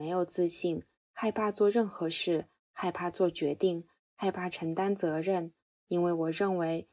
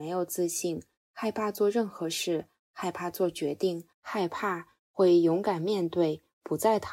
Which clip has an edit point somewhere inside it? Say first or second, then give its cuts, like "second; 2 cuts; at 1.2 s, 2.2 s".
second; 1 cut; at 3.9 s